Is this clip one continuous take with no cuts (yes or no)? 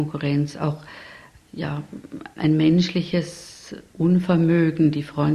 no